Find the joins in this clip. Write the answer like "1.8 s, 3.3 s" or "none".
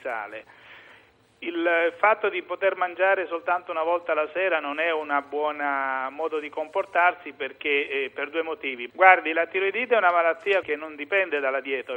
8.9 s, 10.6 s